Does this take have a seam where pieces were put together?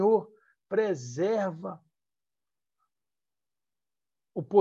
no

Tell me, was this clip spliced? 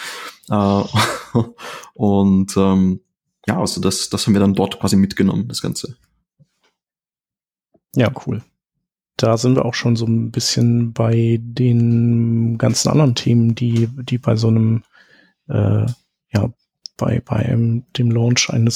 no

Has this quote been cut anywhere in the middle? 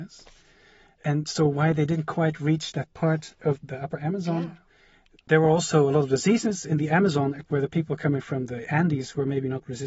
yes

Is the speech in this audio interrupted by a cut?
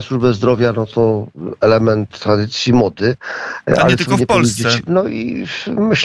yes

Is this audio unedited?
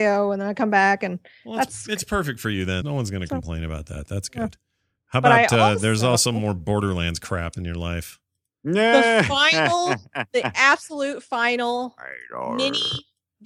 no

